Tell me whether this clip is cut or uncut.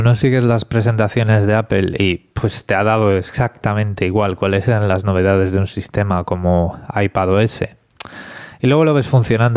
uncut